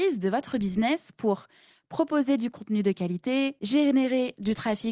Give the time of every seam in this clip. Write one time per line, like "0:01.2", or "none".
0:03.6